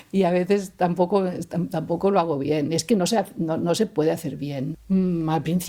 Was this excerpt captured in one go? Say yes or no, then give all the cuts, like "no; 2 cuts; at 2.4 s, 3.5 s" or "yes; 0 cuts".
yes; 0 cuts